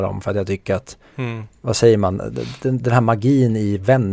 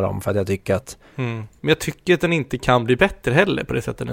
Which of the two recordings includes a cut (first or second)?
second